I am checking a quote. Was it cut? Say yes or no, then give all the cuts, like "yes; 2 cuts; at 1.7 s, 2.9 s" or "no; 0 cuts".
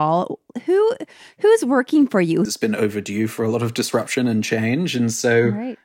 yes; 1 cut; at 2.5 s